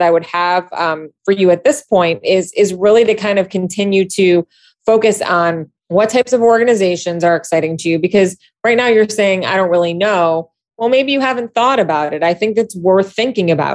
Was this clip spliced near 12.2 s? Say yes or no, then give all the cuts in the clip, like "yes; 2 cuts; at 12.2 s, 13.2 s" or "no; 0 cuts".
no; 1 cut; at 5.8 s